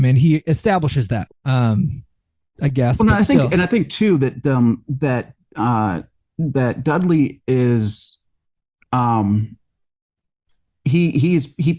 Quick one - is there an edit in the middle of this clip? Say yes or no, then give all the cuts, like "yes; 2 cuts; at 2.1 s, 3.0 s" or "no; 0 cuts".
yes; 1 cut; at 1.3 s